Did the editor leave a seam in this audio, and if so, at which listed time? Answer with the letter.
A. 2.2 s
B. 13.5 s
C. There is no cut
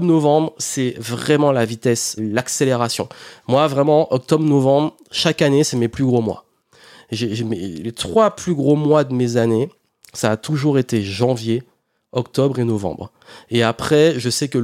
A